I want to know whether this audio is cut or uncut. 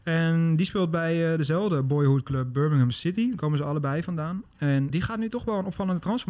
cut